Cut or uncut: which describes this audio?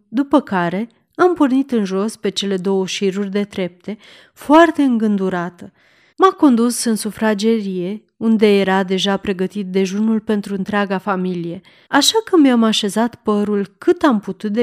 cut